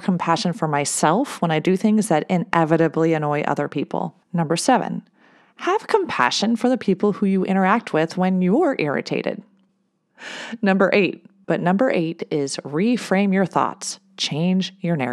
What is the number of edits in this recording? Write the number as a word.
three